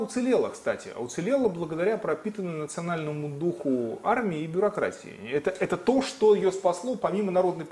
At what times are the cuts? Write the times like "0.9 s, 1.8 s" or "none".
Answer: none